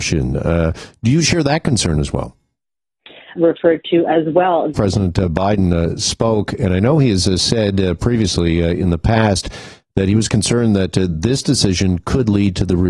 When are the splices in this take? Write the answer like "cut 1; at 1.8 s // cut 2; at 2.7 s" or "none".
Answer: cut 1; at 3.4 s // cut 2; at 4.7 s